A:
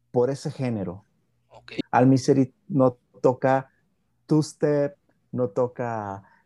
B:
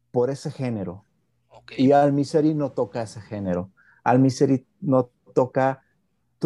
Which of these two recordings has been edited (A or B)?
A